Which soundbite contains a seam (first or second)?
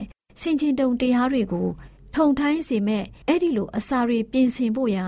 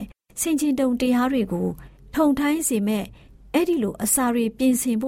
first